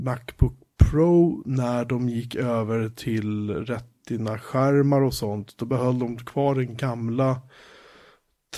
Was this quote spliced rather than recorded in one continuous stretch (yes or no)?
no